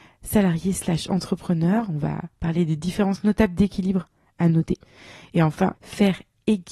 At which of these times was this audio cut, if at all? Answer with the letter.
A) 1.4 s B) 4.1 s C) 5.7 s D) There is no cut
C